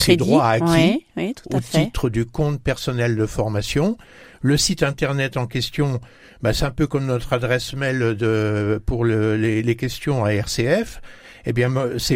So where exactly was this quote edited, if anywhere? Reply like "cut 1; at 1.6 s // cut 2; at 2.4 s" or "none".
none

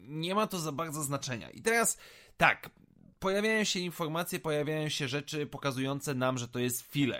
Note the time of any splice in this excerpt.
none

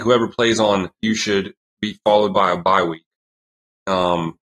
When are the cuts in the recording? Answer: cut 1; at 1.0 s

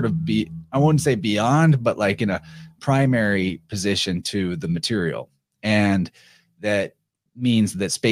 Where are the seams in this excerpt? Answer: none

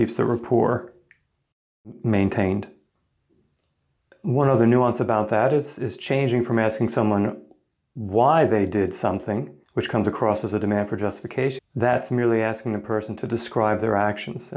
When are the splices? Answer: cut 1; at 9.6 s // cut 2; at 11.6 s

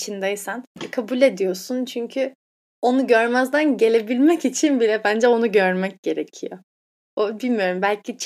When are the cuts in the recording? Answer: none

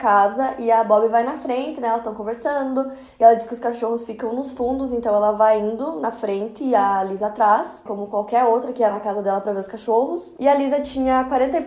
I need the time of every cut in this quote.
cut 1; at 7.9 s // cut 2; at 10.4 s

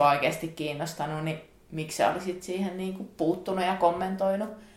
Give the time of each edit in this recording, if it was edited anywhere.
none

